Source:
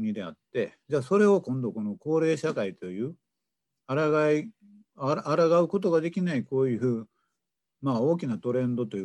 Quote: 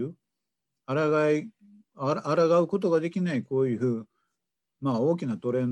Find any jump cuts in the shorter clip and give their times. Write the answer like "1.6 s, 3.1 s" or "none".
none